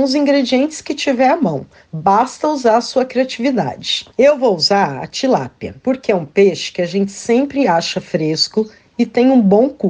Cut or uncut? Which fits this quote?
cut